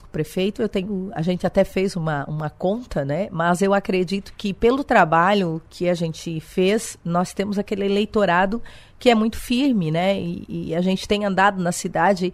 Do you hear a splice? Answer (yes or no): no